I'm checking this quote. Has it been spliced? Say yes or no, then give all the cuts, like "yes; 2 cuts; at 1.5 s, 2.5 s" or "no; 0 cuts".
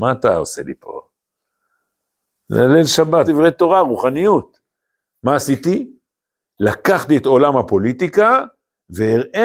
yes; 1 cut; at 3.3 s